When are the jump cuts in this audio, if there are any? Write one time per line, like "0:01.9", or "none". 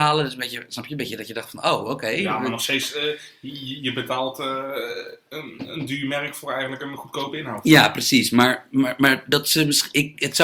none